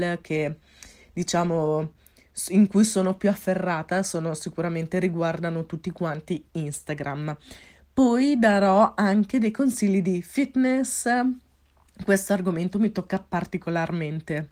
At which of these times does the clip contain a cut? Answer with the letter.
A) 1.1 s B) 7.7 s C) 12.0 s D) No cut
D